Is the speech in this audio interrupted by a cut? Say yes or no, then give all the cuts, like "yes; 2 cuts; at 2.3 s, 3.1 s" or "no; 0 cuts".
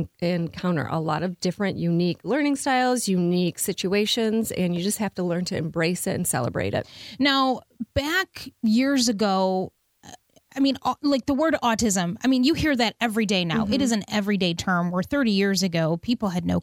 no; 0 cuts